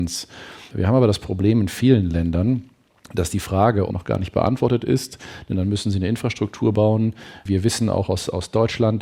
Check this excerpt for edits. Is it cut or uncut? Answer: cut